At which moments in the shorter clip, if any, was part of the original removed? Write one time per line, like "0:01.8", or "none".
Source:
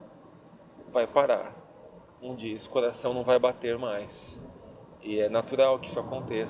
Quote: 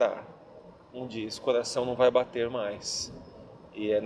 none